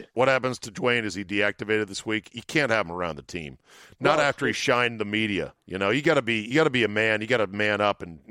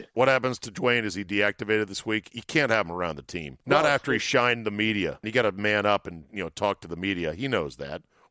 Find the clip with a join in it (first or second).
second